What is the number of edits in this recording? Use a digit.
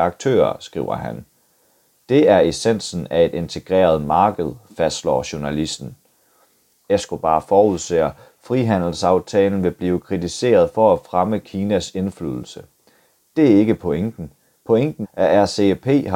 2